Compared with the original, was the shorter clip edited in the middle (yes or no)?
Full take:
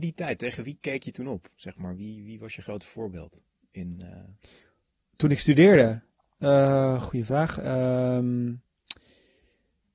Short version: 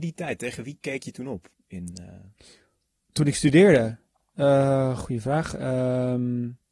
yes